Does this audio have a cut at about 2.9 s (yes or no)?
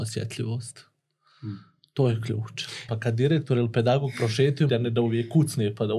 yes